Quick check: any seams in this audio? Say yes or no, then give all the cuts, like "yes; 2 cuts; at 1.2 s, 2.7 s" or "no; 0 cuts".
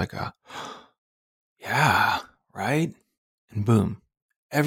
no; 0 cuts